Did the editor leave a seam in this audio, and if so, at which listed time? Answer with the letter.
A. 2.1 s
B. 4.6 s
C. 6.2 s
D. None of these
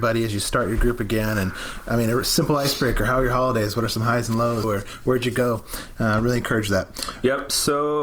B